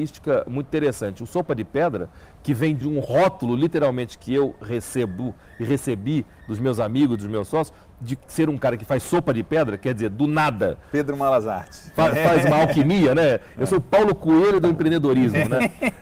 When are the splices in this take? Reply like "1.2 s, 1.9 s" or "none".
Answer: 2.8 s